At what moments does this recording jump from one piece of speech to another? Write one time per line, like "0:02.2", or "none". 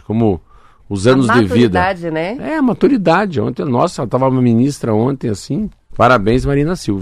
0:05.9